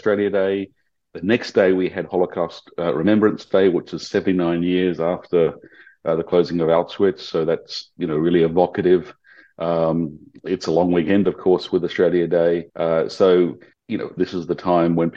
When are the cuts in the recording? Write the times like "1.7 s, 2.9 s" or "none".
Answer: 12.7 s, 14.2 s